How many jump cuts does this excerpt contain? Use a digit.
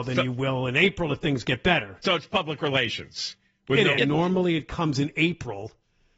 1